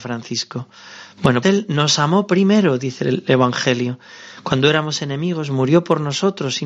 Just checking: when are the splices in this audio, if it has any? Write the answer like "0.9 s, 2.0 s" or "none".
1.4 s